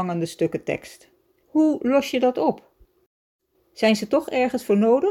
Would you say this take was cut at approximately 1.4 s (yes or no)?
yes